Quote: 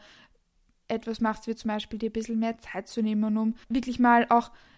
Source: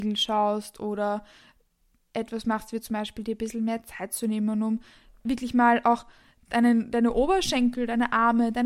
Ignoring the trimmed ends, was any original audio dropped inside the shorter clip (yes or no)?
yes